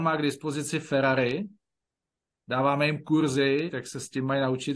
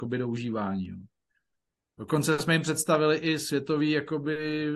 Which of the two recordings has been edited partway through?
first; 1 cut; at 3.7 s

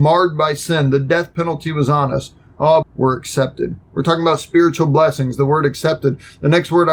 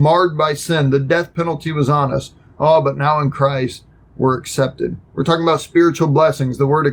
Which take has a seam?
first; 1 cut; at 2.8 s

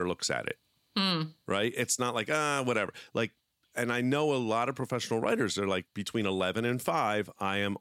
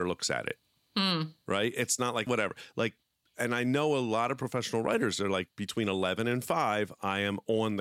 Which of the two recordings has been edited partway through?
second; 1 cut; at 2.3 s

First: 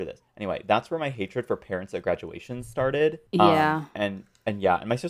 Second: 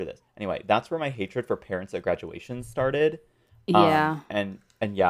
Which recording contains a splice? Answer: first; 1 cut; at 3.3 s

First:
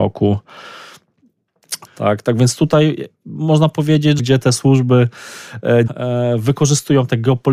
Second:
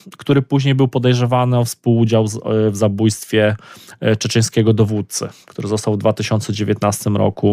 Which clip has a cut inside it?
first; 3 cuts; at 1.9 s, 4.2 s, 5.9 s

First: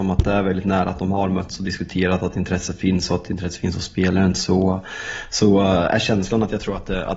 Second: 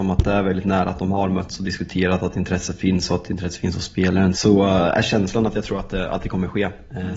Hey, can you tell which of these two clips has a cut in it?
second; 1 cut; at 4.3 s

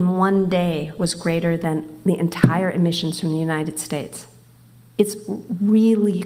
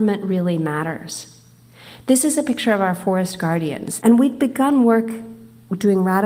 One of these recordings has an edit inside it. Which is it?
second; 1 cut; at 4.0 s

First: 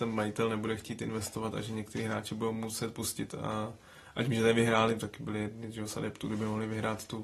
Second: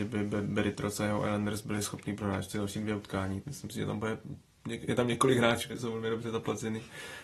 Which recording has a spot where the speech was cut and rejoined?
second; 2 cuts; at 3.4 s, 5.7 s

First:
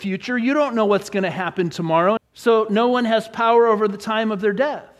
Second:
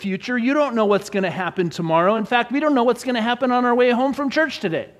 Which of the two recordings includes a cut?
first; 1 cut; at 2.2 s

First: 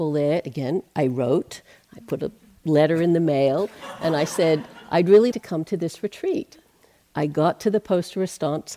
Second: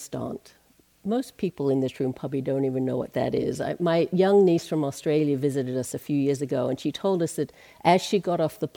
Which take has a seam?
first; 1 cut; at 5.3 s

